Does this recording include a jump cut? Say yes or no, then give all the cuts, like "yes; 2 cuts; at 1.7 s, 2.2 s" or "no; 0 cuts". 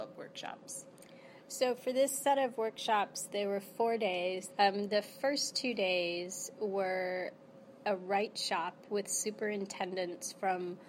yes; 1 cut; at 4.5 s